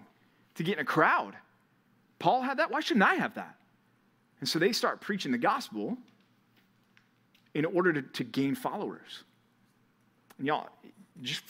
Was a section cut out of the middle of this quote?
no; 0 cuts

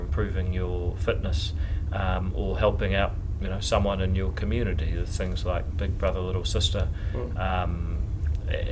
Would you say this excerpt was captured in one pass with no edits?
yes; 0 cuts

